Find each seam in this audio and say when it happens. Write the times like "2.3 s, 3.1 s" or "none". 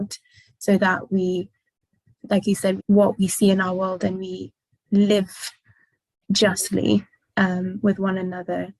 2.8 s